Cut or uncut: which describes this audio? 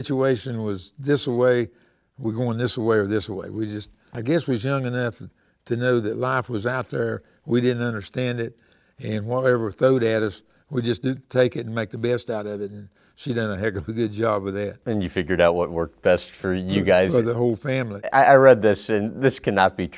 uncut